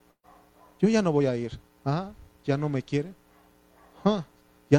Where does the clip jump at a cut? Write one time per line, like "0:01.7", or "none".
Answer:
0:01.8